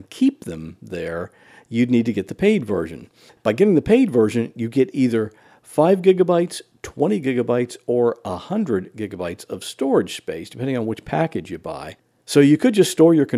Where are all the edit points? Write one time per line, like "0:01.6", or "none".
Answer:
none